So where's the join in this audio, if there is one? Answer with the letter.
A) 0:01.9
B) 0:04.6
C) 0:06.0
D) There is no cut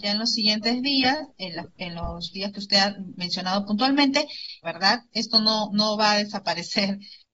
B